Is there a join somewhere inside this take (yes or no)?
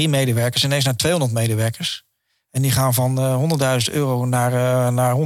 no